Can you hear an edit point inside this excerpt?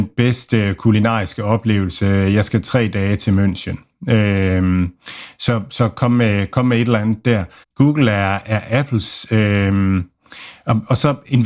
yes; 1 cut; at 7.6 s

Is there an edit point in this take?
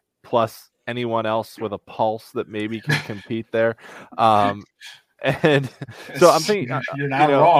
no; 0 cuts

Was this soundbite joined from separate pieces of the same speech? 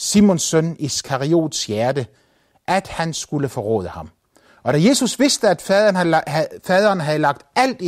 no; 0 cuts

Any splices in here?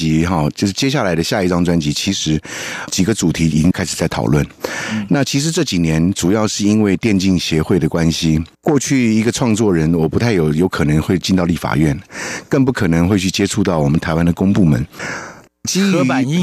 yes; 2 cuts; at 8.5 s, 15.5 s

